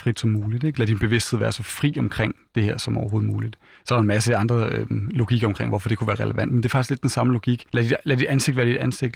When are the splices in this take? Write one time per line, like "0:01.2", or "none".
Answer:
0:07.7

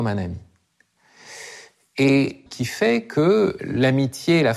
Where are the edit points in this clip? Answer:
0:02.5
0:03.6

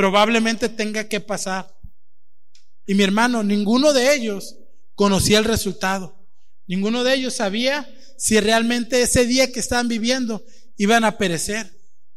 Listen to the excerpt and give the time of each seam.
0:02.9

